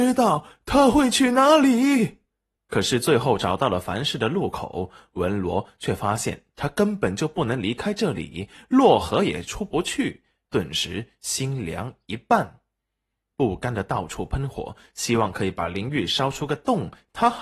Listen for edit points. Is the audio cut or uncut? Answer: cut